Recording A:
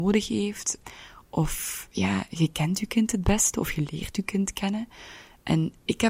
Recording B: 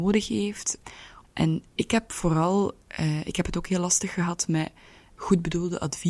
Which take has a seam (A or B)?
B